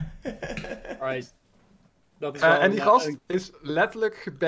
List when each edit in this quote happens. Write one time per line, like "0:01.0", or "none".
0:03.2